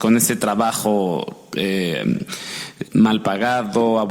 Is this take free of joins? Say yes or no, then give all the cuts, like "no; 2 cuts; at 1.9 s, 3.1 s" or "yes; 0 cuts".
no; 1 cut; at 2.8 s